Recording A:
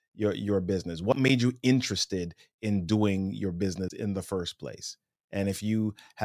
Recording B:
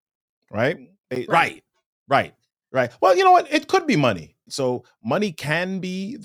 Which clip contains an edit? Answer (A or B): B